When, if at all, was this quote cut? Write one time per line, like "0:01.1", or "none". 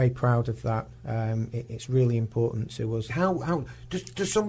0:03.1

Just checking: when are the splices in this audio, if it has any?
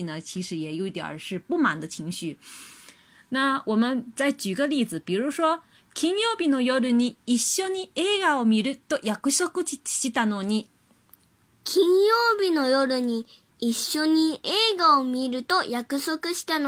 none

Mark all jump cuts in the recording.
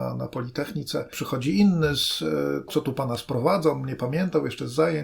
0:02.7

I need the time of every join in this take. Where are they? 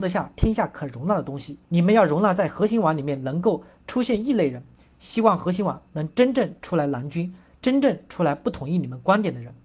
0:01.6

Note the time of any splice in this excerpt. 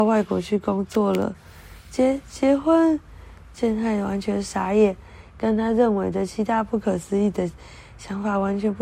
none

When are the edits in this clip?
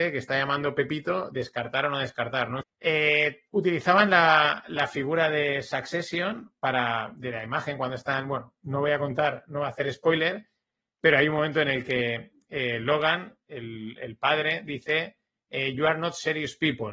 0:02.6

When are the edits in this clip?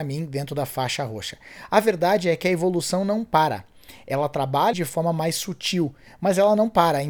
0:04.7

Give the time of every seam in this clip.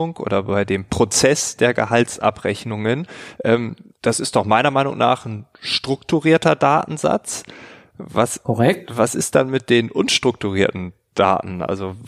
none

